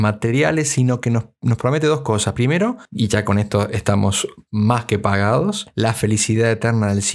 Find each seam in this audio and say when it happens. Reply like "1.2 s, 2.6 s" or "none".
none